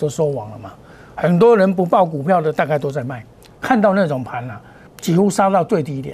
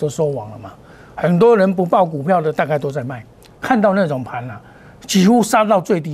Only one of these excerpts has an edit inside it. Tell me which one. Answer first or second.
first